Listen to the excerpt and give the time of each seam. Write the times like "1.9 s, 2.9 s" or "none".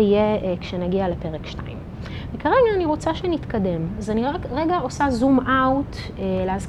none

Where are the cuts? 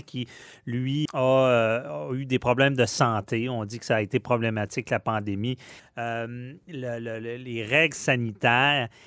1.1 s, 5.8 s

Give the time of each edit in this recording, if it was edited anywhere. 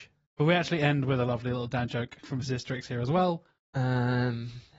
3.6 s

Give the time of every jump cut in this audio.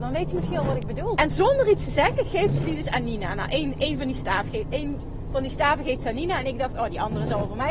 1.2 s

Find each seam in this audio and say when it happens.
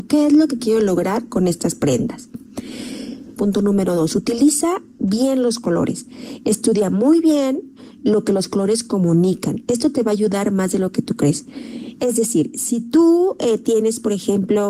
3.3 s

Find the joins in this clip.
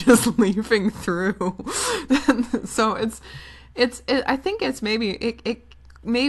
none

